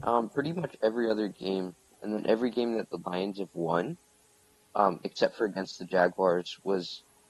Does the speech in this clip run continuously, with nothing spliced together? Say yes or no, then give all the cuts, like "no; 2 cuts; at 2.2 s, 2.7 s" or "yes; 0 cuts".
no; 1 cut; at 1.9 s